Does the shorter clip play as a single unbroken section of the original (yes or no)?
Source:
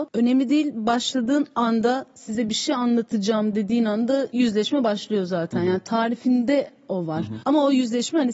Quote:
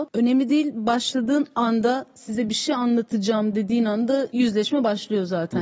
yes